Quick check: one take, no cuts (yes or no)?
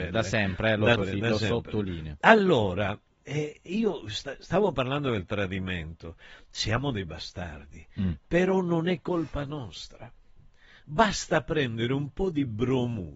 no